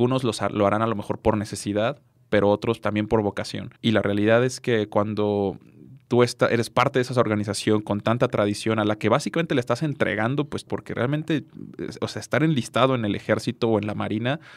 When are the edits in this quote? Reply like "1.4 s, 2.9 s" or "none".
3.8 s, 10.7 s